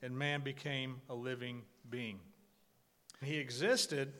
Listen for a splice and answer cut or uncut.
cut